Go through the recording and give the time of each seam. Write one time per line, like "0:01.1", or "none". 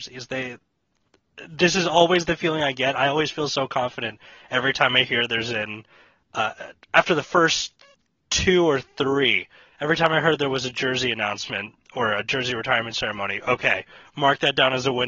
none